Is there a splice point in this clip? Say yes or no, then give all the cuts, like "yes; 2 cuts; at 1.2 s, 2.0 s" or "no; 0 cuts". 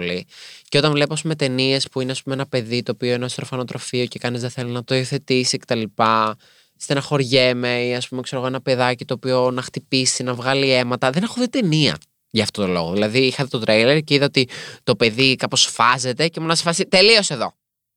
no; 0 cuts